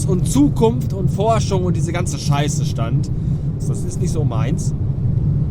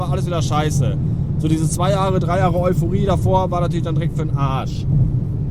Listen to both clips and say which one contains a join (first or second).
first